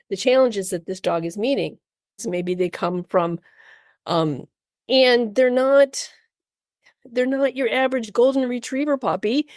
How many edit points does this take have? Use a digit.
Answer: 2